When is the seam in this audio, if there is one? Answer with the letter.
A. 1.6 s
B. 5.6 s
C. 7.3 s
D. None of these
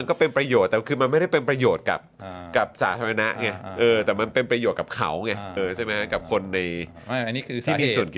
B